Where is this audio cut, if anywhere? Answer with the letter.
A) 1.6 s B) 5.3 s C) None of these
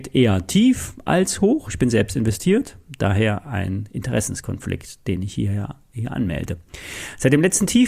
C